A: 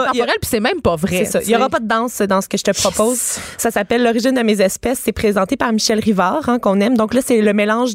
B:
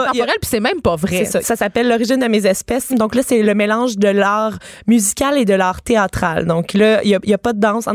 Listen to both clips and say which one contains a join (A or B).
B